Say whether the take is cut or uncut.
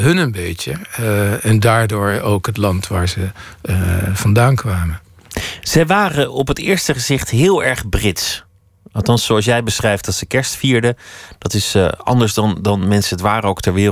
uncut